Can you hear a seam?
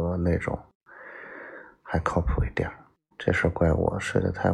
yes; 1 cut; at 3.1 s

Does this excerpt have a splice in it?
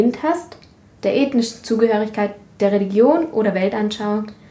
yes; 1 cut; at 1.0 s

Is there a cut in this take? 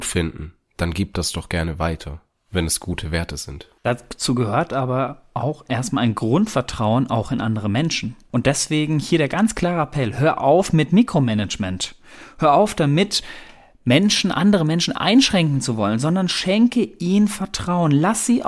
no; 0 cuts

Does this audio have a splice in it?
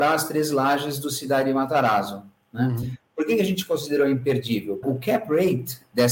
yes; 1 cut; at 4.8 s

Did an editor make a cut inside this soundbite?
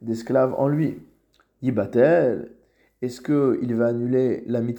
no; 0 cuts

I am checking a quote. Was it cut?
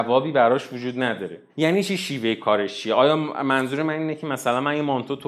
yes; 1 cut; at 1.5 s

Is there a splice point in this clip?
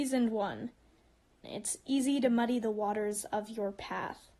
yes; 1 cut; at 1.4 s

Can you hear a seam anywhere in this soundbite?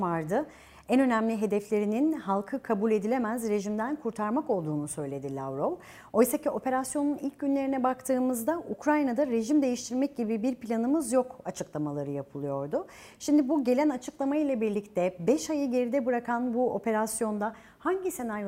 no; 0 cuts

